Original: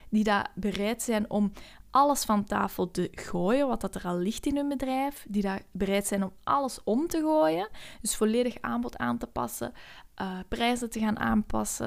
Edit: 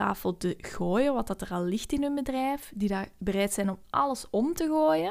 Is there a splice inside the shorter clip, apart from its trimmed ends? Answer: no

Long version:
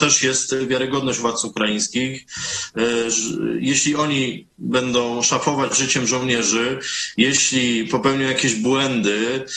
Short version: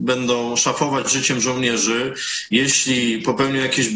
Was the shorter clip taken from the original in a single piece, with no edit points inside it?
yes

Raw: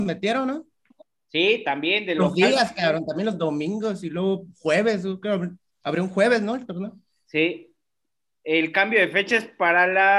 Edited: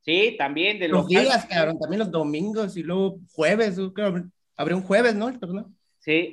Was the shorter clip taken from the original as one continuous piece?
yes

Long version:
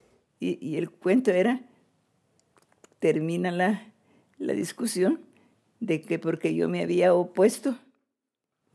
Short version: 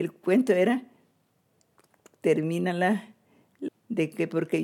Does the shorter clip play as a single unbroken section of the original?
no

